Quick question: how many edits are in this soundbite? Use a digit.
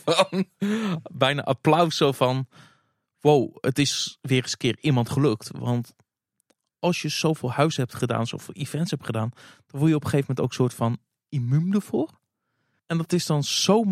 1